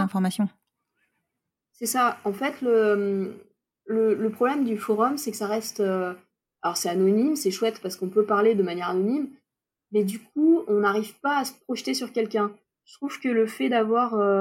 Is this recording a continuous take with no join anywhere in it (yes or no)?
yes